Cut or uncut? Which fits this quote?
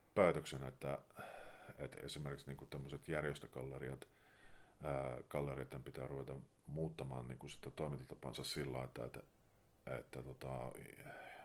uncut